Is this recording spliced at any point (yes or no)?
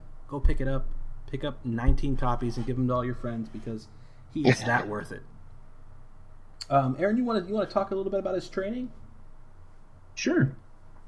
no